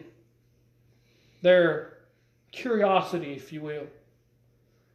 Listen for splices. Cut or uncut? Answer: uncut